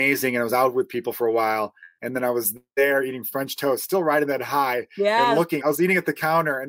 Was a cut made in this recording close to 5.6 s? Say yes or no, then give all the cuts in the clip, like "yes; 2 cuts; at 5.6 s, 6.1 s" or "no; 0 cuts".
yes; 1 cut; at 5.6 s